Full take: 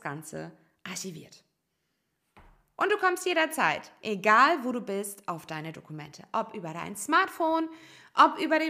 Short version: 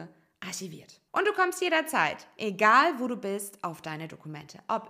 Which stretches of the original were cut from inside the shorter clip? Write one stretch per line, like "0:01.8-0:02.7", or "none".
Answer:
0:01.5-0:02.7